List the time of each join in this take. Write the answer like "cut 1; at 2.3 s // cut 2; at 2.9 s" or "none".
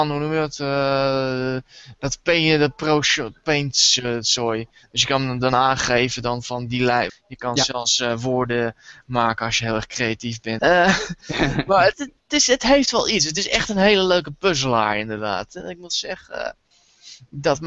cut 1; at 7.1 s // cut 2; at 10.6 s // cut 3; at 11.9 s